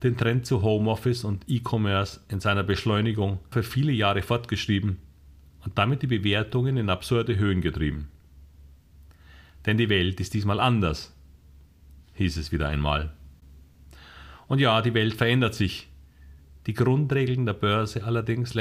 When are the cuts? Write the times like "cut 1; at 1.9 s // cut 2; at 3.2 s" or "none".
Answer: cut 1; at 3.5 s